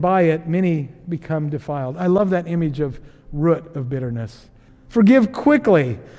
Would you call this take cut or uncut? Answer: cut